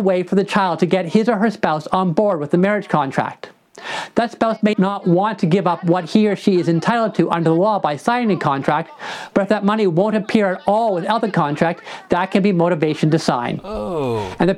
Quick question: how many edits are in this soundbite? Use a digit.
0